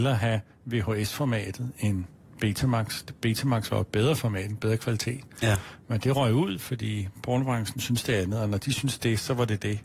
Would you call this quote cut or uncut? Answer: uncut